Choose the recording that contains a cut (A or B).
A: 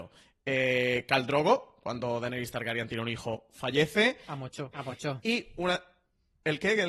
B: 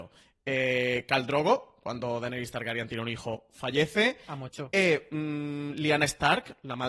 A